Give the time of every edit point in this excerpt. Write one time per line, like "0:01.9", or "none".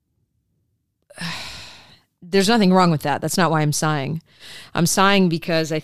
none